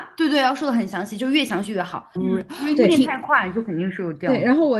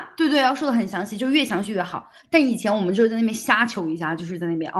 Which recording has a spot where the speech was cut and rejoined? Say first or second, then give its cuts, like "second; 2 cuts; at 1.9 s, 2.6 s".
first; 1 cut; at 2.1 s